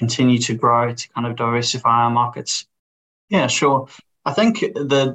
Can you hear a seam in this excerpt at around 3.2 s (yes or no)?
yes